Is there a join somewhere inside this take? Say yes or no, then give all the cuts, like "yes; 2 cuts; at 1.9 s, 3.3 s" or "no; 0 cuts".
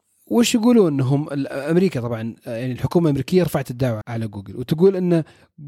yes; 1 cut; at 4.0 s